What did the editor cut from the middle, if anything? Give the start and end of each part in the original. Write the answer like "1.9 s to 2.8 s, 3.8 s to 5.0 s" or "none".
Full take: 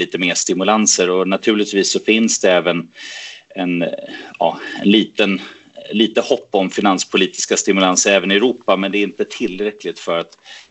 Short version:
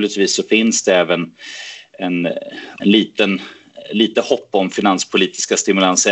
4.4 s to 4.8 s